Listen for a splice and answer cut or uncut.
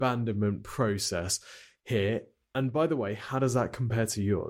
uncut